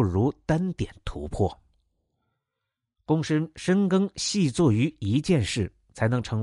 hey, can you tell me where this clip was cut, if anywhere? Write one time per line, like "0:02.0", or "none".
none